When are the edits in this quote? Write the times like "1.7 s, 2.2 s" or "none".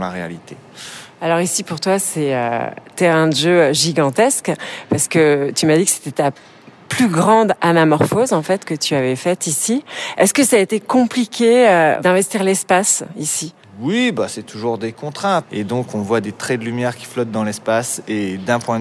15.4 s